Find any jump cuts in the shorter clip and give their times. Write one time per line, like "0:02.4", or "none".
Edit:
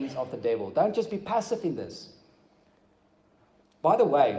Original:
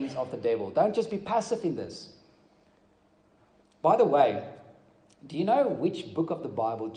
none